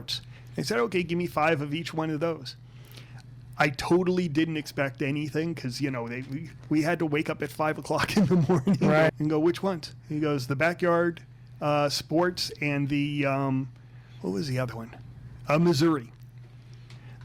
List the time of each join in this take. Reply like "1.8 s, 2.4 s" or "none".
9.1 s

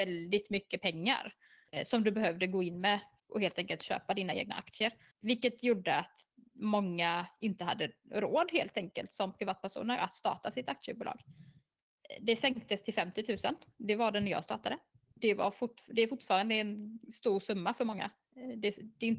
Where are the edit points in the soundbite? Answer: none

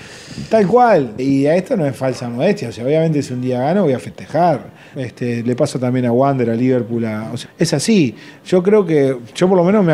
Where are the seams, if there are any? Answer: 1.2 s, 4.9 s, 7.4 s

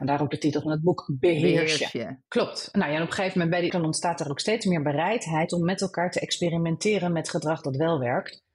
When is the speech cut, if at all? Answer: 2.3 s, 3.7 s

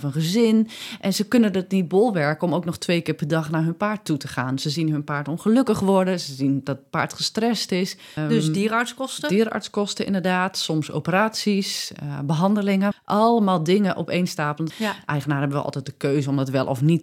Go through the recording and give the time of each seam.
8.2 s, 12.9 s, 14.7 s

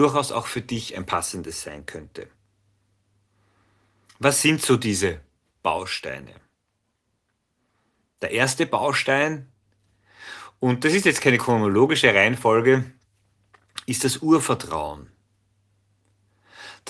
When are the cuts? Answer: none

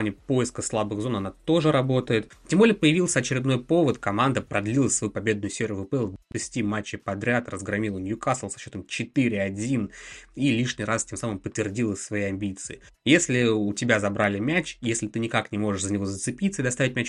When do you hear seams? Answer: 2.3 s, 12.9 s

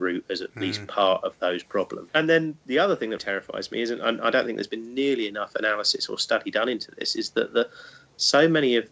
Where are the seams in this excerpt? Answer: 2.1 s, 3.2 s

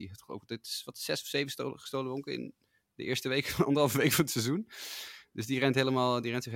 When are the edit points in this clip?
none

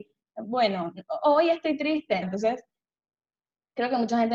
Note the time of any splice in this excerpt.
2.2 s

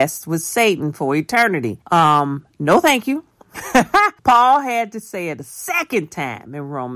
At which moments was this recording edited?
1.8 s, 4.2 s

